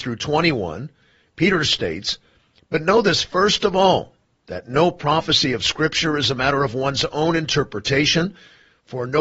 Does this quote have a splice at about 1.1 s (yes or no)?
no